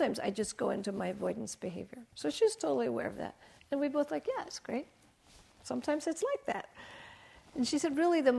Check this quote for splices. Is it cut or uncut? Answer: uncut